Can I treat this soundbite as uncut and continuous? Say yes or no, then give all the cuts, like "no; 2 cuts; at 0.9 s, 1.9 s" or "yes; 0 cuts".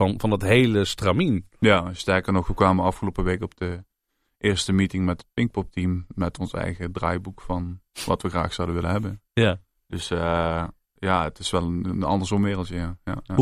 yes; 0 cuts